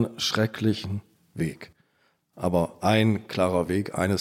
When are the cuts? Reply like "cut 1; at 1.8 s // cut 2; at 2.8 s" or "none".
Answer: none